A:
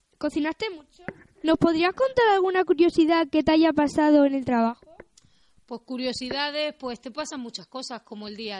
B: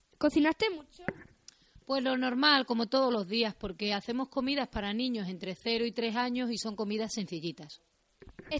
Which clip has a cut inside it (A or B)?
A